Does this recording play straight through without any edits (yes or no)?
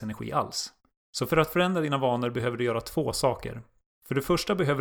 yes